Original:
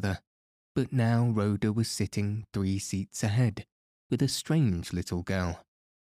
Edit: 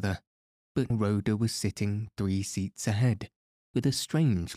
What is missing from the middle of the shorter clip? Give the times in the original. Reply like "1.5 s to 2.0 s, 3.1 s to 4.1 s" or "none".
0.9 s to 1.3 s